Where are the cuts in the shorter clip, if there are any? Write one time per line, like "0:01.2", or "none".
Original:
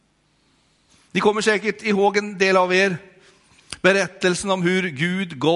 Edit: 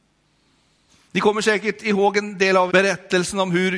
0:02.7